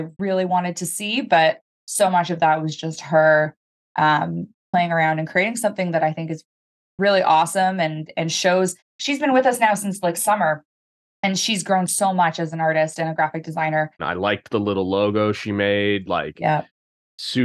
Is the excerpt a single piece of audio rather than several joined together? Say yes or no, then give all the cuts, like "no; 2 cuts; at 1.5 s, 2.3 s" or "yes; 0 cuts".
no; 2 cuts; at 4.6 s, 14.0 s